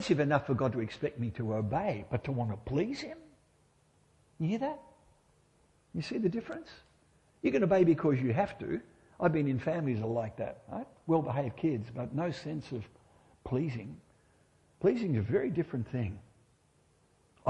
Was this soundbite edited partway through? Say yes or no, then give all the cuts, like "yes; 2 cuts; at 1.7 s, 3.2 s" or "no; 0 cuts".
no; 0 cuts